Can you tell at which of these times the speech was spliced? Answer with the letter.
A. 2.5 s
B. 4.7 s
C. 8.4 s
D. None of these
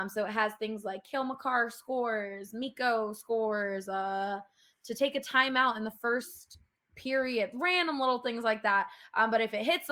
D